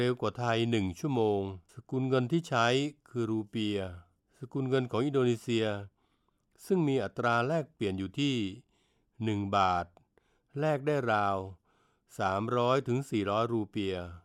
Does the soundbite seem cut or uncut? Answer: cut